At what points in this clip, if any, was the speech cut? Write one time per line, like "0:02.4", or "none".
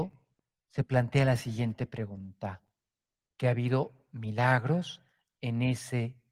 0:03.3